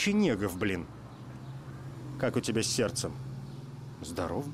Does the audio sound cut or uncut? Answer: uncut